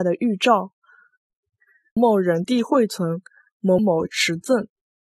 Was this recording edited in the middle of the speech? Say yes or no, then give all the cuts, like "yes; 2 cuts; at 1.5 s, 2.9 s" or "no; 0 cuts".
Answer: yes; 2 cuts; at 2.0 s, 3.8 s